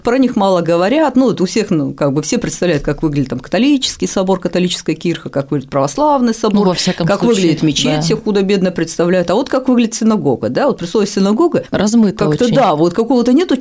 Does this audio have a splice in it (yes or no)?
no